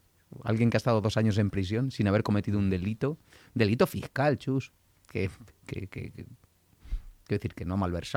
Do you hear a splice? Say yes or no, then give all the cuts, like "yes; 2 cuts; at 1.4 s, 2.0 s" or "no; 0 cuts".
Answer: no; 0 cuts